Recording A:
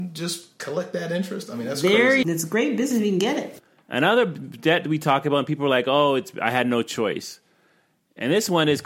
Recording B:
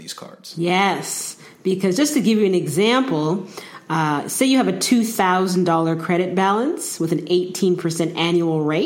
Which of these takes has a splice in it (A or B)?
A